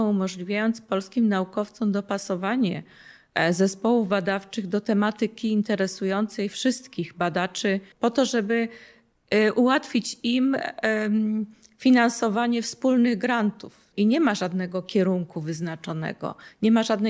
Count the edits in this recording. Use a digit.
2